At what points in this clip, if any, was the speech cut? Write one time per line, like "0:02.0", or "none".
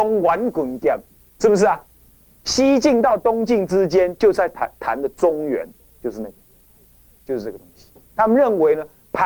none

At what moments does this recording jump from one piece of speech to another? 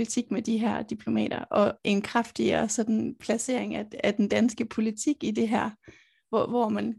0:01.8

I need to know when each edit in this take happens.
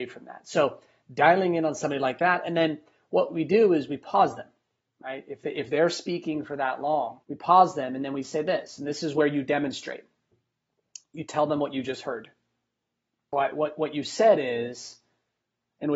0:07.2
0:13.3

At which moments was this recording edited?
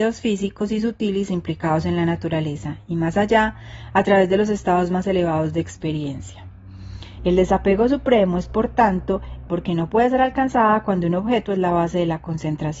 0:07.2
0:09.5

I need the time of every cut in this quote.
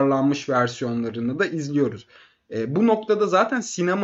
none

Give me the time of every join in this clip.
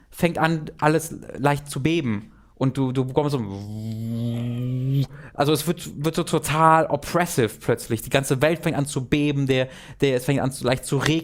none

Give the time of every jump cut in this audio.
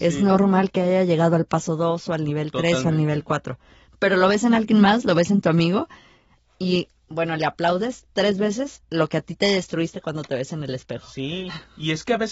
none

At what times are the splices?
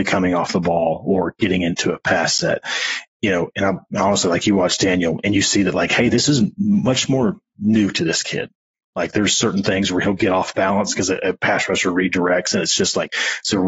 none

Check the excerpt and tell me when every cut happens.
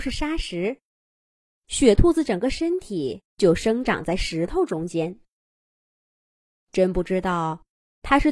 0:03.3

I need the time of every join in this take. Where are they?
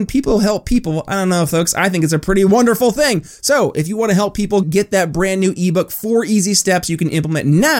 0:04.6

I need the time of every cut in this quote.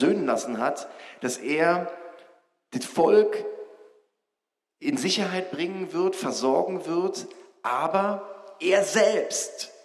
none

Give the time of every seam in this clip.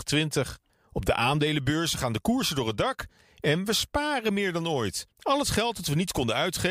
0:05.1

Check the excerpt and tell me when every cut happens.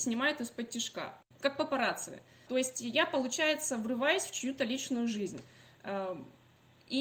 0:02.5

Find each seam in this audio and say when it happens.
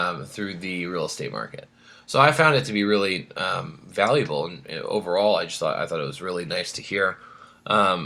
none

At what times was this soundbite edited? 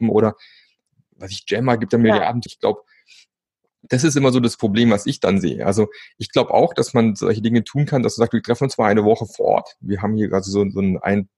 0:02.5

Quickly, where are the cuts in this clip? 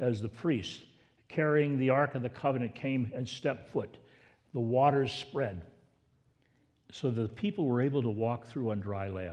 none

